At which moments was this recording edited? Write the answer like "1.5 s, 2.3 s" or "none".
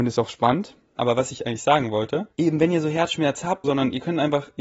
1.0 s, 2.3 s, 3.6 s